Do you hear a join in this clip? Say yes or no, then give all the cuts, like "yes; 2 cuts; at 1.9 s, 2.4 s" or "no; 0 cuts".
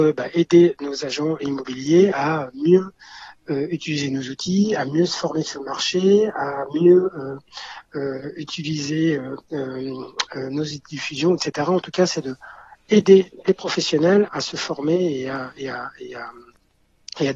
yes; 1 cut; at 14.3 s